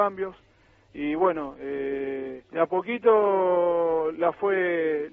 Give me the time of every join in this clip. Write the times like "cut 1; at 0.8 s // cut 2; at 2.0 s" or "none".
cut 1; at 2.4 s